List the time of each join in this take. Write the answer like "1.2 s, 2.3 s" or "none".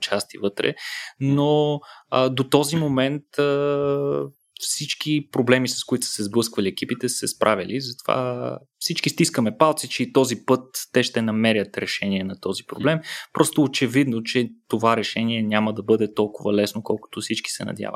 none